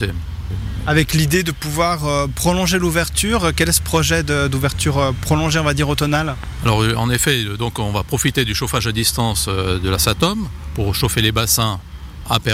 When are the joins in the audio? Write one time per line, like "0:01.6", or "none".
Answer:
none

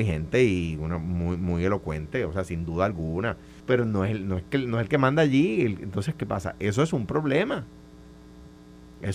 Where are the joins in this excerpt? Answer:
0:03.6

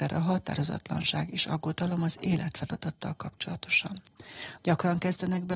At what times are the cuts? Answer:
0:04.6

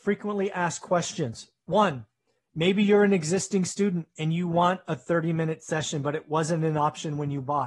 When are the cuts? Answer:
none

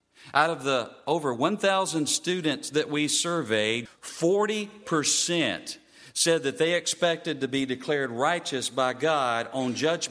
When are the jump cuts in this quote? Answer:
0:03.9

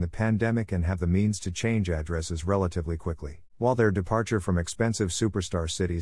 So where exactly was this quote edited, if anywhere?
0:03.5

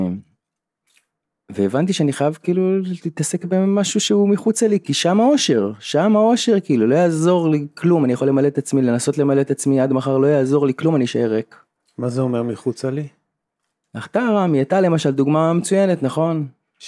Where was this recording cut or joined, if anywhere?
0:04.8

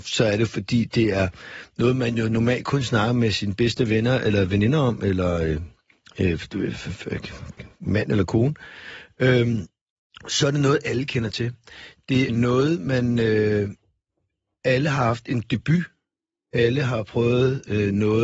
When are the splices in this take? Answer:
0:12.3

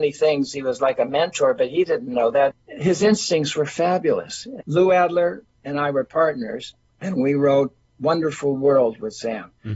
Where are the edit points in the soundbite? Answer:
0:04.6

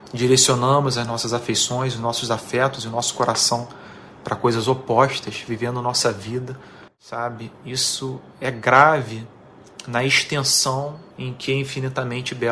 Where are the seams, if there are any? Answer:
0:06.9
0:11.1

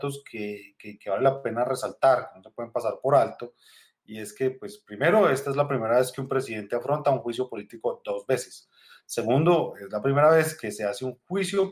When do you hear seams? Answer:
none

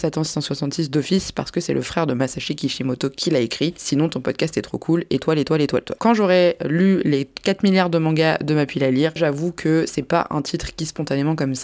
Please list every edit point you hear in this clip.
0:06.0
0:09.2

